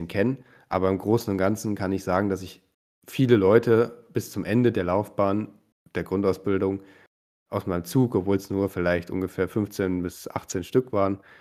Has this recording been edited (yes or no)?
no